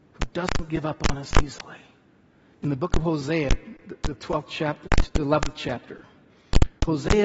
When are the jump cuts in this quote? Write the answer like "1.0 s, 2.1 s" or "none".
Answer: 2.5 s